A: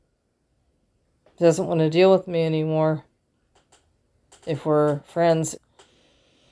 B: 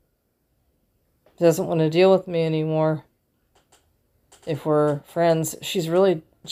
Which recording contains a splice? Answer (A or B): A